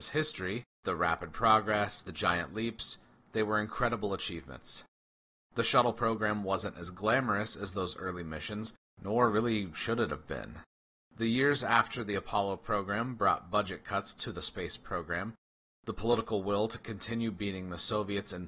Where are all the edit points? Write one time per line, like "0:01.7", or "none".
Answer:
none